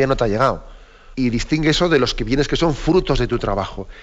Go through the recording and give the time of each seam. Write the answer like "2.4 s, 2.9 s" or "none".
1.1 s